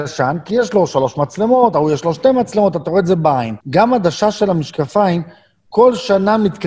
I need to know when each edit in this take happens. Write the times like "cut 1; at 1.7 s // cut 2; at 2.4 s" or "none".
cut 1; at 3.6 s